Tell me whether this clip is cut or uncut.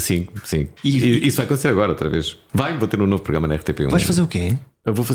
cut